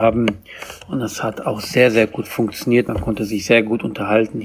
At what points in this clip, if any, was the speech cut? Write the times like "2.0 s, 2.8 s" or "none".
none